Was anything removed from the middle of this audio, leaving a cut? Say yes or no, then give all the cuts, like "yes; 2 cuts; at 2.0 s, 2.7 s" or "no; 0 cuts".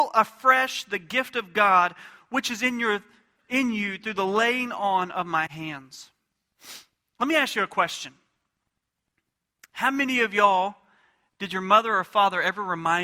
no; 0 cuts